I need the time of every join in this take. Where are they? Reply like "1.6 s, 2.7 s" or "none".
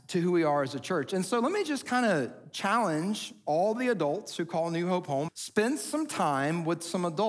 5.3 s